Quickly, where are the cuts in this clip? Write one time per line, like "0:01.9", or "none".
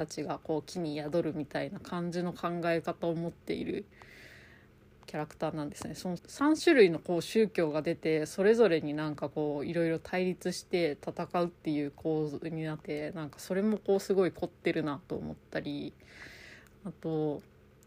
0:06.2
0:12.8